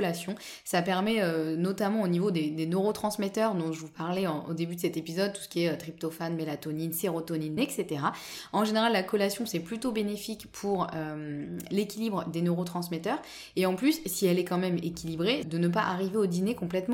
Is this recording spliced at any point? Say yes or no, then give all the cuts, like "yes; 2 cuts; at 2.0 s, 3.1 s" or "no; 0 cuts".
yes; 2 cuts; at 7.6 s, 15.4 s